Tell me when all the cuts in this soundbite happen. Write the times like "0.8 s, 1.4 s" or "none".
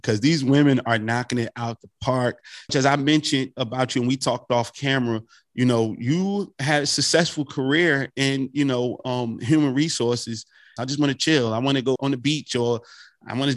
2.7 s, 10.8 s, 12.0 s